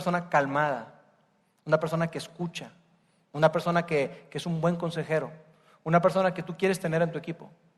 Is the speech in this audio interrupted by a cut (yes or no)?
no